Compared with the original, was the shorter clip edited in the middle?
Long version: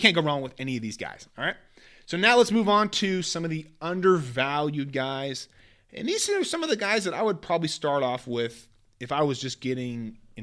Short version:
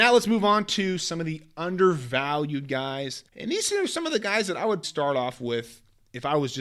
yes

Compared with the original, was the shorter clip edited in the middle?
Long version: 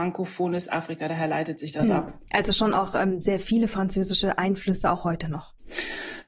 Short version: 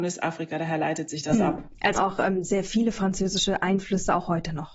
yes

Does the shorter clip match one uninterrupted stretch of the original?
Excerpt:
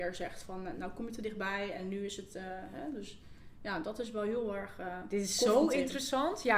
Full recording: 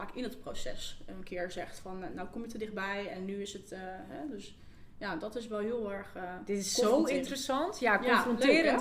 yes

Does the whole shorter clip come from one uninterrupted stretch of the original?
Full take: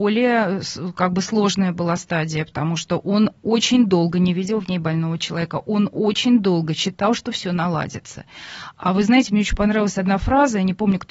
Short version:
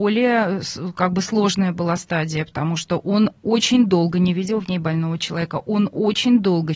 yes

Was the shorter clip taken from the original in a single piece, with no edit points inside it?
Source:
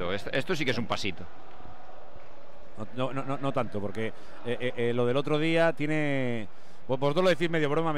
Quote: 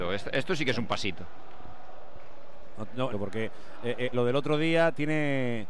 no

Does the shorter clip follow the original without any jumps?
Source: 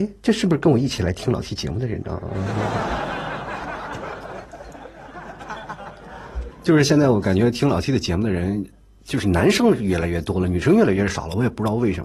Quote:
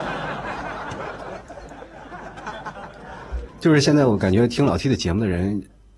yes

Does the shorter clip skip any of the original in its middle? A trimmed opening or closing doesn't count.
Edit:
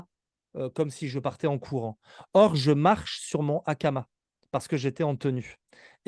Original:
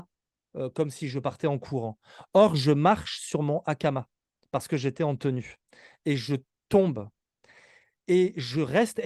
no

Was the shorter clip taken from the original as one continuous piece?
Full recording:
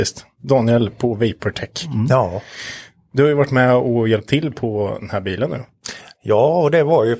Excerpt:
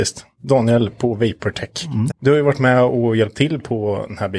no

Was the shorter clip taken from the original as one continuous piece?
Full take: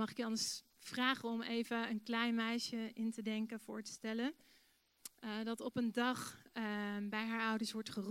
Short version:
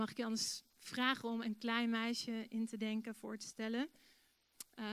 no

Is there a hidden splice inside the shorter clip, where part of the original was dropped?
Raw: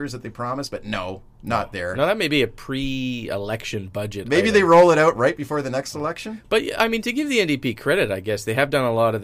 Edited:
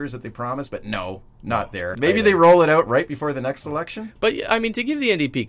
yes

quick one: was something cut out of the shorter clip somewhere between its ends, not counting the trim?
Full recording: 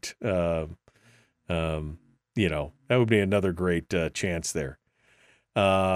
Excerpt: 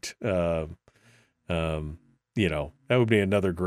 no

